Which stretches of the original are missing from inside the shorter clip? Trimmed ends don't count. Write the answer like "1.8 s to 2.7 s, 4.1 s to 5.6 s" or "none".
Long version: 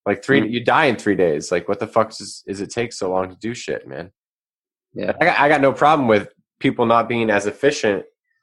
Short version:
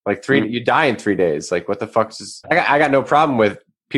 2.4 s to 5.1 s